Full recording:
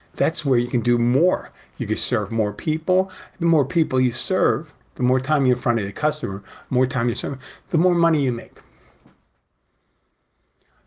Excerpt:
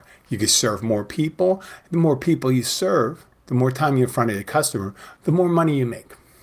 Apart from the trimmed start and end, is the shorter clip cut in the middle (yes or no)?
yes